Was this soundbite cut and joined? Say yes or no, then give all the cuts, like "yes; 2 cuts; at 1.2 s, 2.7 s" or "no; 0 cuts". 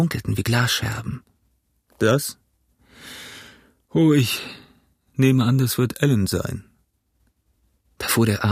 no; 0 cuts